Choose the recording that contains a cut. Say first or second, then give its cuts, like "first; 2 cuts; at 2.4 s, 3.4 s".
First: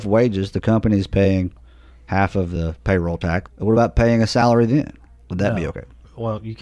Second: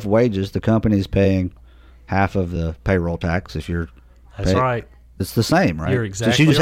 first; 1 cut; at 3.5 s